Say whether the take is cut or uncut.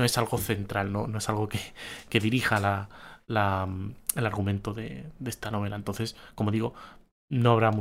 uncut